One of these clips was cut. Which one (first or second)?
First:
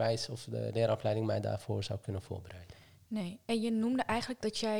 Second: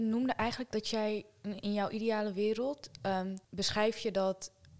second